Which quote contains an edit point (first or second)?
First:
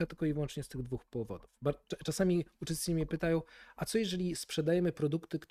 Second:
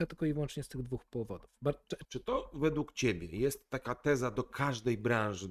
second